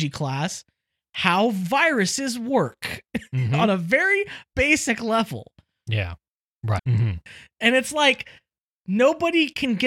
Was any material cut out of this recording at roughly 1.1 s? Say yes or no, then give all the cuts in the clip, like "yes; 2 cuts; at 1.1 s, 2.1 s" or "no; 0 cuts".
no; 1 cut; at 6.8 s